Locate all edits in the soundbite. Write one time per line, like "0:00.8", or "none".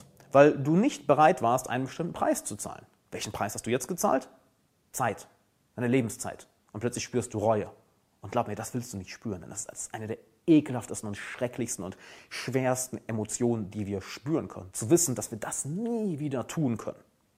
0:14.7